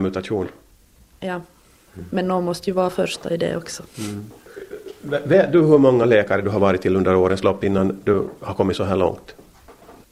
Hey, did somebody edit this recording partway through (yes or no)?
no